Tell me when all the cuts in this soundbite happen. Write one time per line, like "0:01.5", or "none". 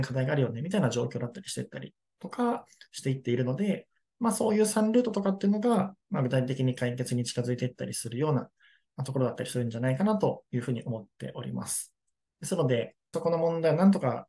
0:12.2